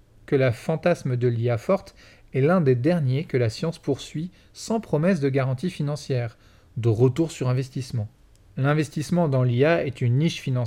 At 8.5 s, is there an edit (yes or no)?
yes